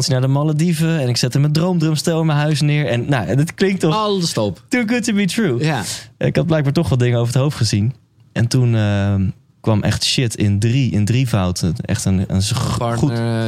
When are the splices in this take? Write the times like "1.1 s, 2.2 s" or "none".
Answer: 11.8 s